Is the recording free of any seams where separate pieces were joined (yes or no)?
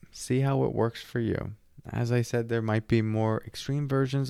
yes